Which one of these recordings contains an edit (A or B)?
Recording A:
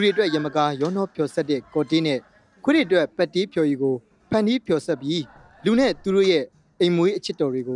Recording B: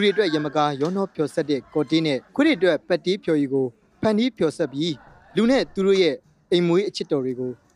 B